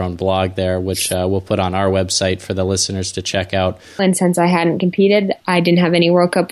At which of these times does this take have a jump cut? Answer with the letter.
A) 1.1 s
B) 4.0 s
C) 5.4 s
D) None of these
B